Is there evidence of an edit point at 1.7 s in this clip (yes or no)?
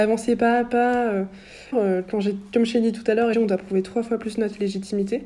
yes